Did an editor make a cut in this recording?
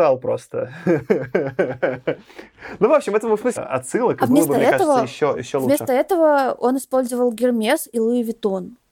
yes; 1 cut; at 3.6 s

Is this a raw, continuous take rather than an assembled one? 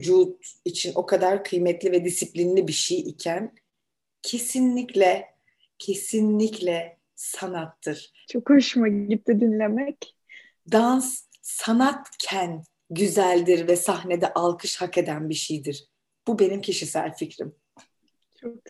no; 2 cuts; at 8.2 s, 10.6 s

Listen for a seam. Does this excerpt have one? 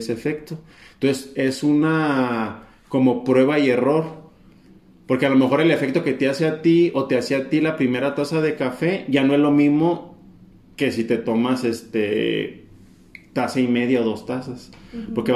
no; 0 cuts

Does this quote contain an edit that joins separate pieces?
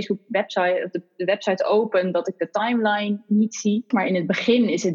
yes; 1 cut; at 3.9 s

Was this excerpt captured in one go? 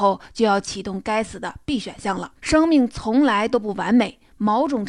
no; 1 cut; at 2.4 s

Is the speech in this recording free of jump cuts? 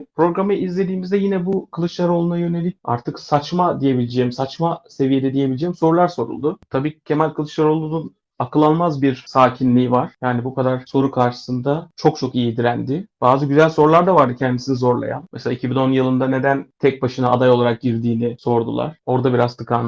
yes; 0 cuts

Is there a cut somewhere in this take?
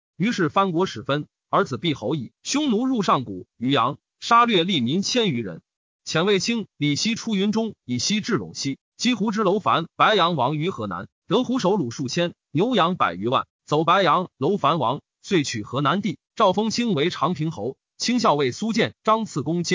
yes; 2 cuts; at 2.3 s, 16.2 s

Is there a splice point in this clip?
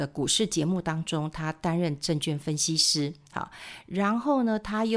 no; 0 cuts

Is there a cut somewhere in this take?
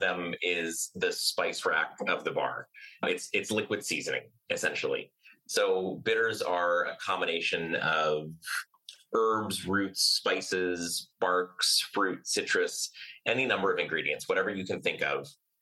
no; 0 cuts

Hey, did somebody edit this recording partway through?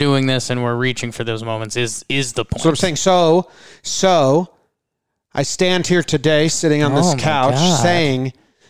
no; 0 cuts

